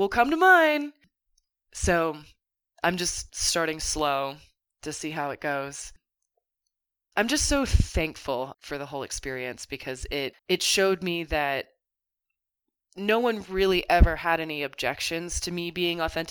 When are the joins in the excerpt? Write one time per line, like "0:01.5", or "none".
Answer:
0:08.5
0:10.4